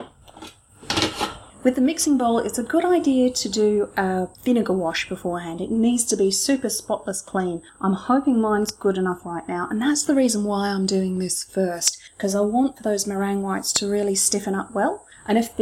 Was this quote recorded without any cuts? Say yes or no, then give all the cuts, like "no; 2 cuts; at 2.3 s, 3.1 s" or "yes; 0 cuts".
yes; 0 cuts